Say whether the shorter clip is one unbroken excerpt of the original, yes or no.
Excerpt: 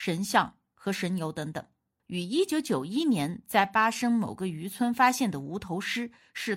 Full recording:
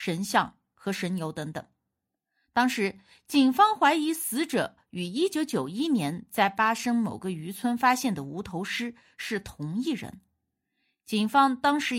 no